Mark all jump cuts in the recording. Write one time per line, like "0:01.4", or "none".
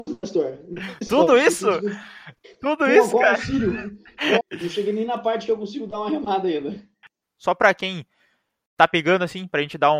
0:04.4
0:07.2